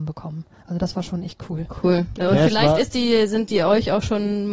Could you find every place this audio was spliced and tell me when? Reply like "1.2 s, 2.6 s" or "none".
2.2 s